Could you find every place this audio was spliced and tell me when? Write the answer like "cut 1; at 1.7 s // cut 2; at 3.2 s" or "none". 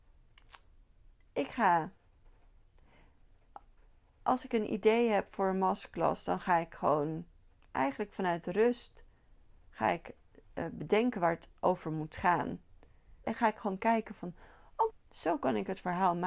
cut 1; at 13.2 s // cut 2; at 14.9 s